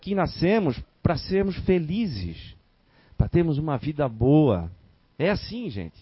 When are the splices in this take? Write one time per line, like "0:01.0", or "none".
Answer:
0:05.0